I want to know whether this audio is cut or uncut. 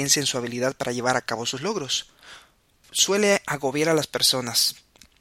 uncut